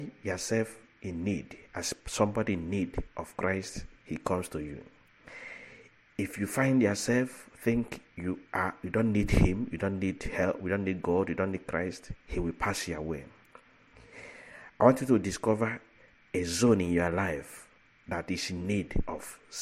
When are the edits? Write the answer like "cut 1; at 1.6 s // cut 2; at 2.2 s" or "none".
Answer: cut 1; at 4.0 s // cut 2; at 12.2 s